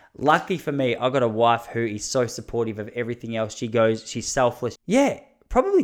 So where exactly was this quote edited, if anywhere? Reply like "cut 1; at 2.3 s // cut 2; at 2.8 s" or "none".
cut 1; at 4.7 s